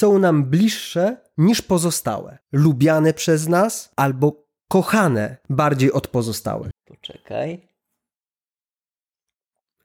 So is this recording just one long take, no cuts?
no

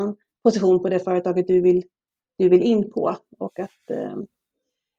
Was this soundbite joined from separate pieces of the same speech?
no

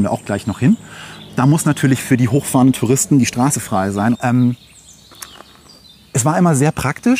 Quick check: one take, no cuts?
no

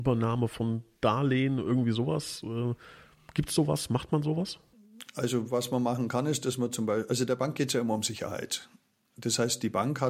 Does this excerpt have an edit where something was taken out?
no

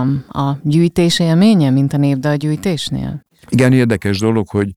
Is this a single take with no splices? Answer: yes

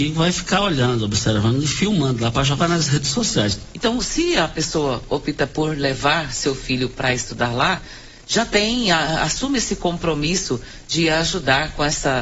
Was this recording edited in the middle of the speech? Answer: yes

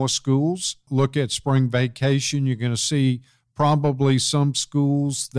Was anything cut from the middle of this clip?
no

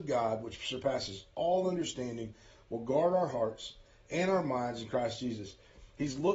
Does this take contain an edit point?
no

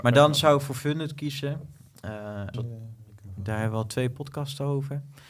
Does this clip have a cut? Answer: yes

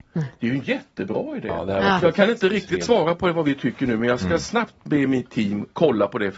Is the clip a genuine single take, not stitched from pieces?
yes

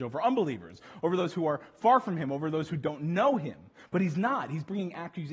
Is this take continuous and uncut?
yes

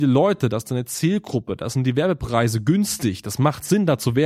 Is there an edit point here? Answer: no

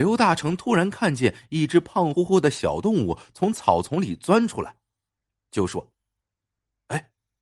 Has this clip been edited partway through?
yes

